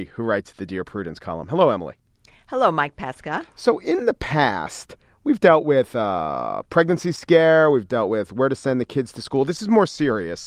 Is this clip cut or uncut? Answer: uncut